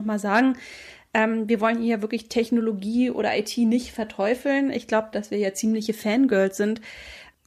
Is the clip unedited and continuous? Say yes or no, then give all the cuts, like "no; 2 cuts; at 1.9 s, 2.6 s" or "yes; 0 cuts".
no; 1 cut; at 5.1 s